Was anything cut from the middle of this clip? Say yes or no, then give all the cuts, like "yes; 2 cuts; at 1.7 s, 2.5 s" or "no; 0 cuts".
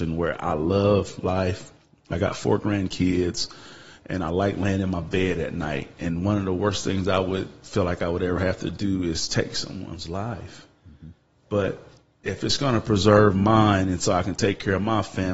no; 0 cuts